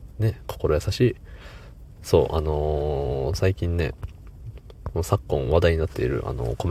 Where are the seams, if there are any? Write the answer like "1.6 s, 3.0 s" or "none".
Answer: 2.0 s